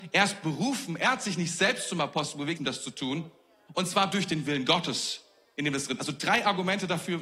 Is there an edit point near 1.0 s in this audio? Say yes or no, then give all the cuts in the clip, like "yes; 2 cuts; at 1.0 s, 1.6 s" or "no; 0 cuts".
no; 1 cut; at 2.6 s